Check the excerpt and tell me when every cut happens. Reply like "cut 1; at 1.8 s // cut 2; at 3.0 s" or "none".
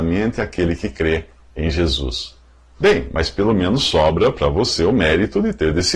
none